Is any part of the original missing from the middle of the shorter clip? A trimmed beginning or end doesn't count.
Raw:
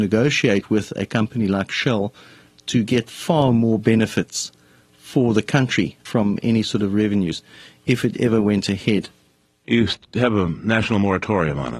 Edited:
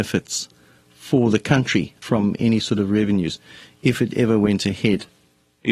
no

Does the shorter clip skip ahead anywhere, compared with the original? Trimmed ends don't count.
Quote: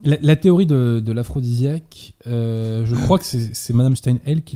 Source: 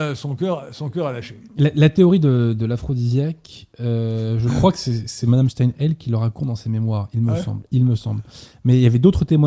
no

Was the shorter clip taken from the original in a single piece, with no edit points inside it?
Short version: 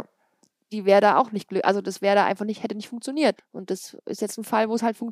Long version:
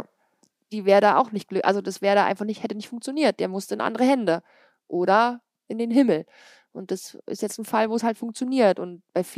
no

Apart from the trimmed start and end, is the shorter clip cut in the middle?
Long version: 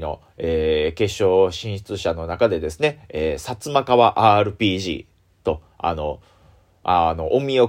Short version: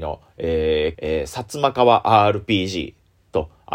yes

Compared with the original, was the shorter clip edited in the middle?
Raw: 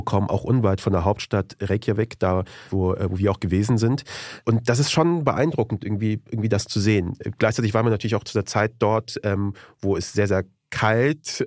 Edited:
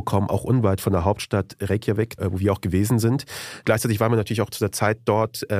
yes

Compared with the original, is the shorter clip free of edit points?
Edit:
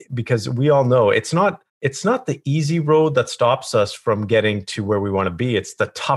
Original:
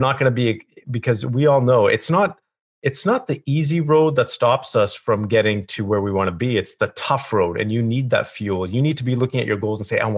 no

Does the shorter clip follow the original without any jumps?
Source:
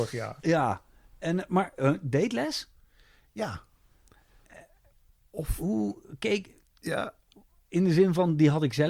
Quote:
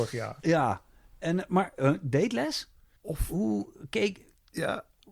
no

